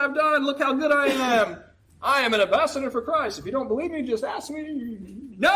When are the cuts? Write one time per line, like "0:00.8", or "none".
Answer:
none